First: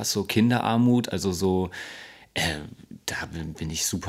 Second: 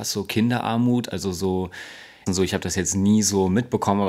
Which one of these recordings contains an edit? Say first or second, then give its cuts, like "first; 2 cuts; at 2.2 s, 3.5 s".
second; 1 cut; at 2.3 s